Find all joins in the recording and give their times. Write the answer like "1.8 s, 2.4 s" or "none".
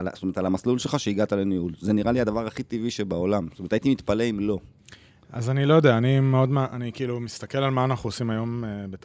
none